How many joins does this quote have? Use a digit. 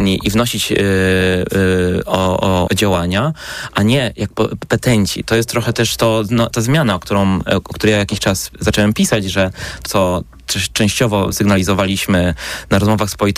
3